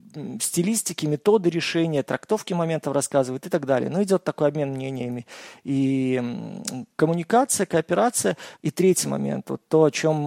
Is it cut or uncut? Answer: cut